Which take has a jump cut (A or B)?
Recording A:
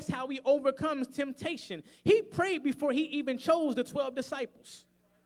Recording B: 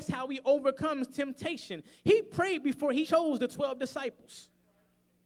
B